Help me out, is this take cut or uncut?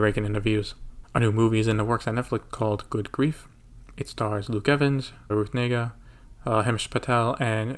cut